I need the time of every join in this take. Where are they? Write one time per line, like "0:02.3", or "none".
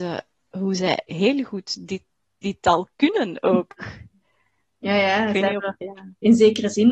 0:01.1